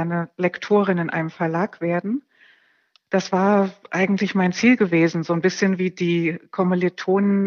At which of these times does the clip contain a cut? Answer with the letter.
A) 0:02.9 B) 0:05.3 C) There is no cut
C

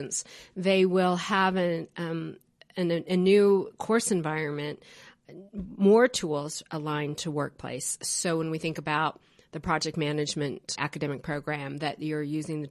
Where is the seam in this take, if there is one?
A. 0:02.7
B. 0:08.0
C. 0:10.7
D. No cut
C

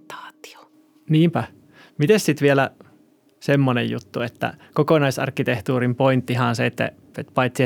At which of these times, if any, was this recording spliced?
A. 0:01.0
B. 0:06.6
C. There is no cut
C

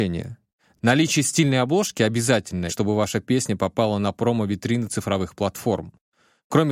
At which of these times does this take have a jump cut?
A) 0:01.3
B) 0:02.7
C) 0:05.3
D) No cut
B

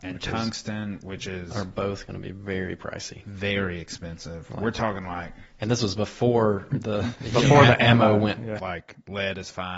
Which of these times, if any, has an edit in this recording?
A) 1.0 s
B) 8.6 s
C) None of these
B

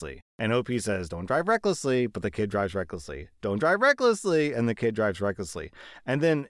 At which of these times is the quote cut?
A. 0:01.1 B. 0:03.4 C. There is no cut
C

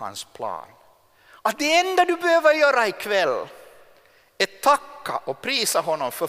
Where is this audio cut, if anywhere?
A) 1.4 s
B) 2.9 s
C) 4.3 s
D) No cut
D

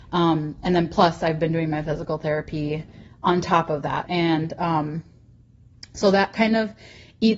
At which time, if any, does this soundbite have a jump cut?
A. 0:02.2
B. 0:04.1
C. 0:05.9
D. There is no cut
B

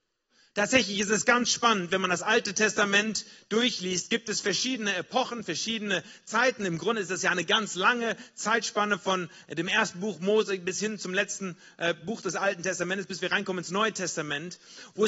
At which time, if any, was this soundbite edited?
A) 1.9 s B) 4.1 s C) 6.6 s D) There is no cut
D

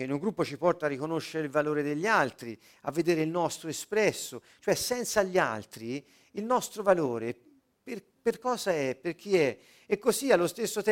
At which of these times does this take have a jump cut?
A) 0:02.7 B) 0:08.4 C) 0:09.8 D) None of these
D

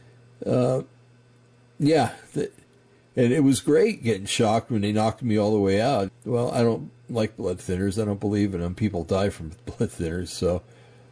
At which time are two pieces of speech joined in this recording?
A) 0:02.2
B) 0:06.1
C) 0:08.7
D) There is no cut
B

